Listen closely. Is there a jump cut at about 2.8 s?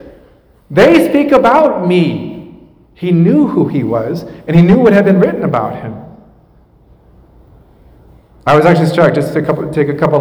no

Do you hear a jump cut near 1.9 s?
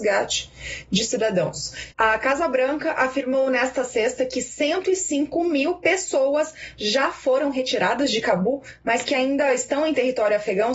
yes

